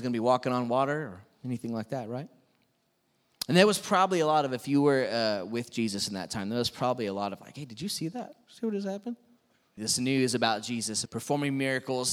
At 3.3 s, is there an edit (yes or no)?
no